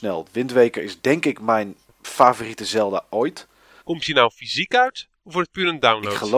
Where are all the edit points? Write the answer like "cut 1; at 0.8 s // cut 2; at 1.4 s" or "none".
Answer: cut 1; at 3.8 s